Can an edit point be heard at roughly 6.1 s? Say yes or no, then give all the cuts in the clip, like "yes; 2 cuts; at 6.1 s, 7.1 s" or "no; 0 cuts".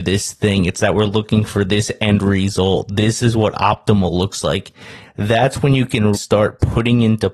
yes; 2 cuts; at 5.0 s, 6.1 s